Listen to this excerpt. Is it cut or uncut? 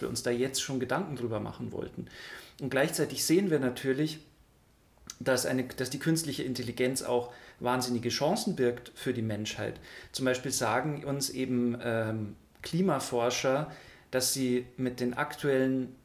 uncut